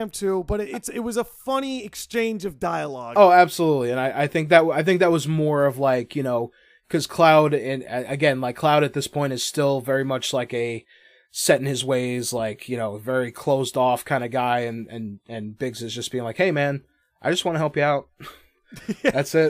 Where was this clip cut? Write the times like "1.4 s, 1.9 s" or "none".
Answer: none

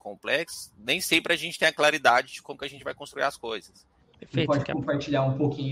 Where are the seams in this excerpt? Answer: 4.0 s

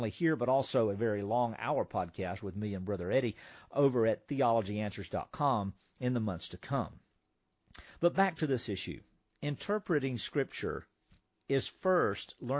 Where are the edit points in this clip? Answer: none

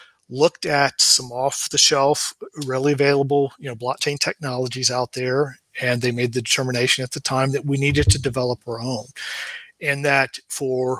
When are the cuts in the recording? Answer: none

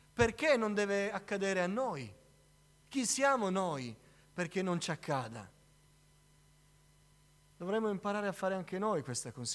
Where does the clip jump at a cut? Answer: none

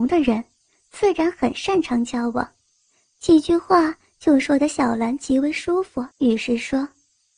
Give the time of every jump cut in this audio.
6.1 s

